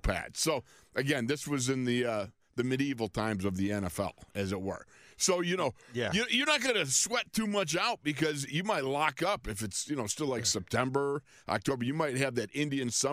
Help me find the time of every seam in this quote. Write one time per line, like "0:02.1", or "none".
none